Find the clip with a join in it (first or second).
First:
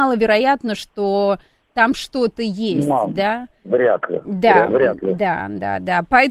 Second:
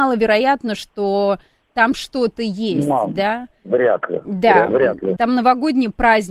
second